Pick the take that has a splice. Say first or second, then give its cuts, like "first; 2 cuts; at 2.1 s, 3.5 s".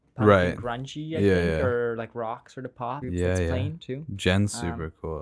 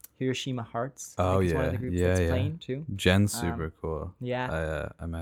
first; 1 cut; at 3.0 s